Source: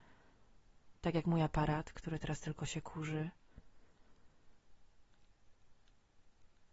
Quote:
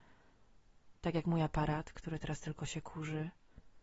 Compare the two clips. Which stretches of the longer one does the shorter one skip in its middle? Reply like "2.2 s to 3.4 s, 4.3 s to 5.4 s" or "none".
none